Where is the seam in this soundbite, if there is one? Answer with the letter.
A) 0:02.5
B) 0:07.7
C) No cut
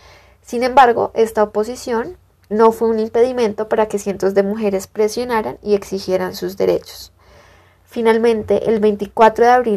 A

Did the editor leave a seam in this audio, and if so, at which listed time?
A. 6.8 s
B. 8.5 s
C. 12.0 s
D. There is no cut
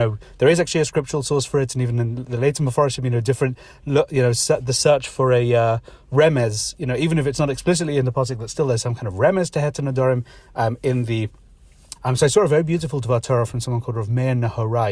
C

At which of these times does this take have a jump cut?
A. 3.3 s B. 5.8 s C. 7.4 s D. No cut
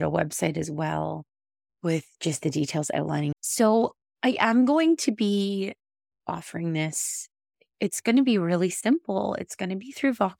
A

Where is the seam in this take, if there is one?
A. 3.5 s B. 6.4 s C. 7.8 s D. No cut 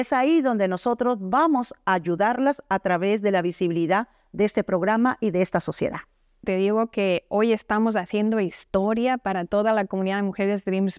B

